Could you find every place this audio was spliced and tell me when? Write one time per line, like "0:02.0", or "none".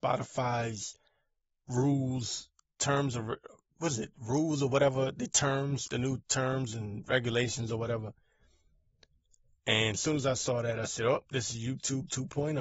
0:02.8